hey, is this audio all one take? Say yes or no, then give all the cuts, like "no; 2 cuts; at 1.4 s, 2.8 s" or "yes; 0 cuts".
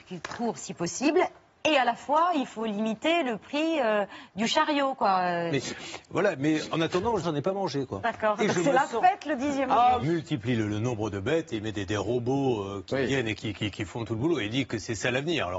no; 3 cuts; at 5.5 s, 7.2 s, 10.0 s